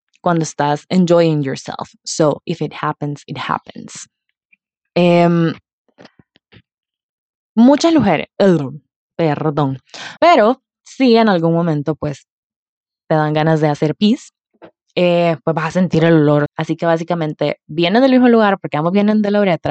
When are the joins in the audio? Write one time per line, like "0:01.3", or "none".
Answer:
0:10.2
0:16.5